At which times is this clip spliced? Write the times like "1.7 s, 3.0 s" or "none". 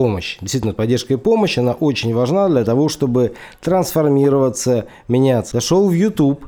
5.5 s

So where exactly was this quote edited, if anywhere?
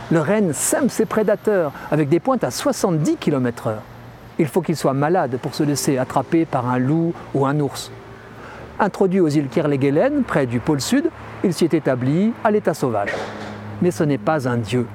8.8 s

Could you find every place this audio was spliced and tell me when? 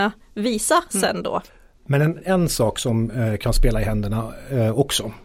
none

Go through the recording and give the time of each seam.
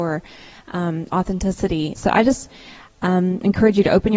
2.0 s

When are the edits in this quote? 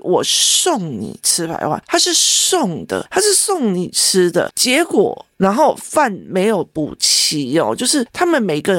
4.5 s

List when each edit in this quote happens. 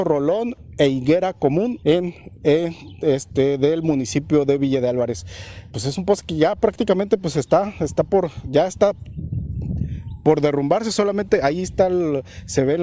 1.8 s

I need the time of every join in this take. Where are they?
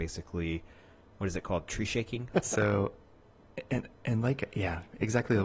2.3 s

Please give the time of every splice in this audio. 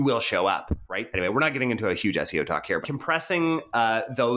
1.1 s, 2.8 s

